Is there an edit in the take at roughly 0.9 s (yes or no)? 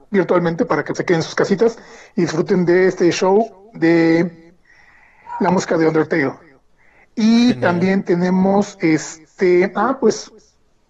yes